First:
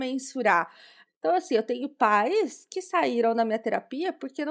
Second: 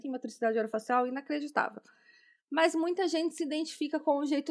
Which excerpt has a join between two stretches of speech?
first; 1 cut; at 1.1 s

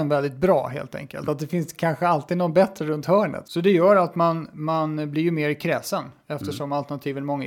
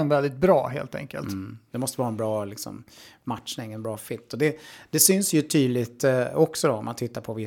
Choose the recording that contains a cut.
first; 2 cuts; at 1.3 s, 3.4 s

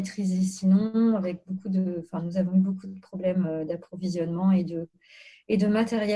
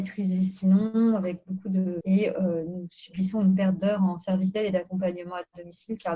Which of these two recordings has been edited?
second; 1 cut; at 2.0 s

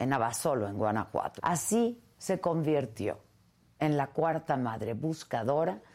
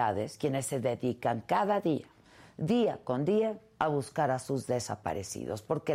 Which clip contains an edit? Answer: first; 1 cut; at 1.4 s

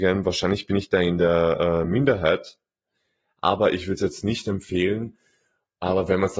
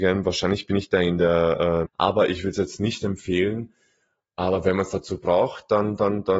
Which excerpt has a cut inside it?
second; 1 cut; at 1.8 s

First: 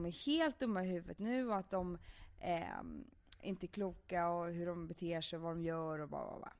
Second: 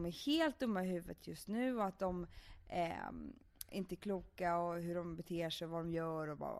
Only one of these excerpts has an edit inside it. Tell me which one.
first; 1 cut; at 1.2 s

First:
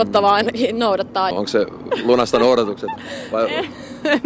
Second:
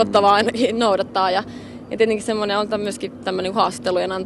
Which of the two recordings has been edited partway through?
first; 1 cut; at 1.3 s

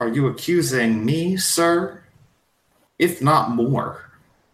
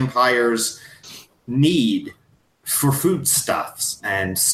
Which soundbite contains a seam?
first; 1 cut; at 2.9 s

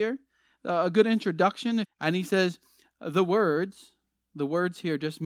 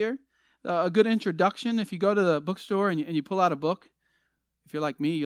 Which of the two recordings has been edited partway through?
first; 1 cut; at 1.8 s

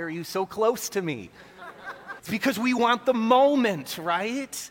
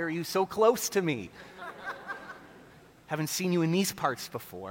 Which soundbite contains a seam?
first; 1 cut; at 2.2 s

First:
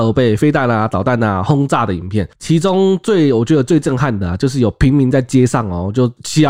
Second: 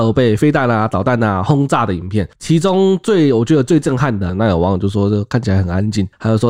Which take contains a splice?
second; 1 cut; at 4.3 s

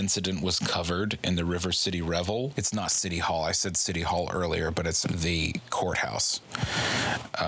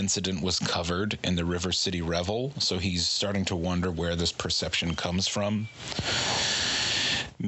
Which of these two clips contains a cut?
first; 2 cuts; at 2.5 s, 5.0 s

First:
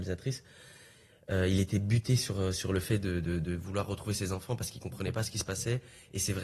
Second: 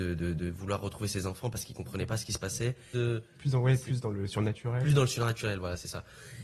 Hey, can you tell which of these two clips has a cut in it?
second; 1 cut; at 2.9 s

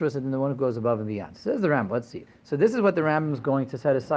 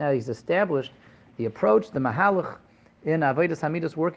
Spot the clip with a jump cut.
first; 1 cut; at 2.3 s

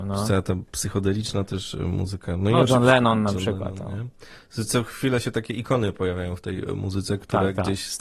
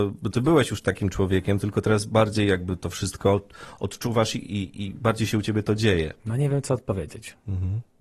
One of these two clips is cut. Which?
second; 1 cut; at 6.2 s

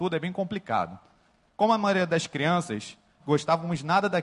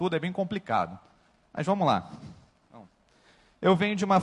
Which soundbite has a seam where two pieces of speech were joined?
first; 2 cuts; at 1.5 s, 3.2 s

